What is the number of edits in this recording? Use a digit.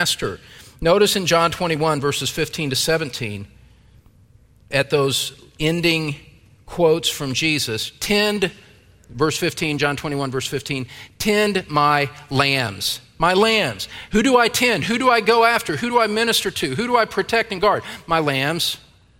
0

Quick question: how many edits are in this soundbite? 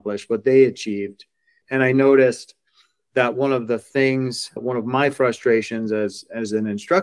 2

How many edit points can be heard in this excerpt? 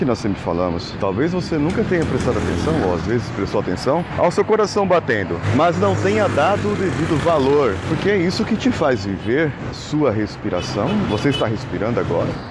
1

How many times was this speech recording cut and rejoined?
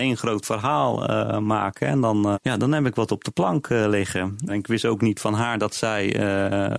2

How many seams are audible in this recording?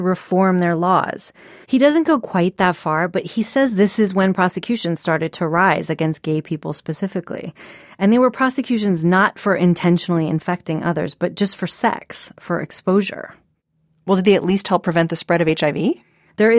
1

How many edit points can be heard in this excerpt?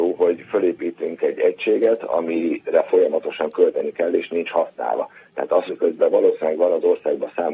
1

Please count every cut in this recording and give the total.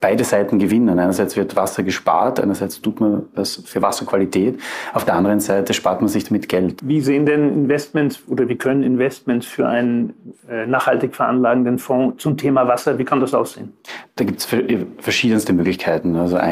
1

